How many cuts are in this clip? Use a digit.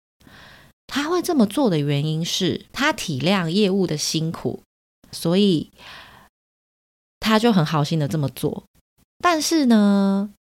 2